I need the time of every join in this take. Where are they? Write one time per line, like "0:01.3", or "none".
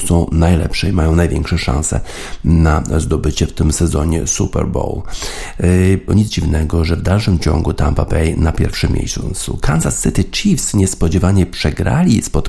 0:06.1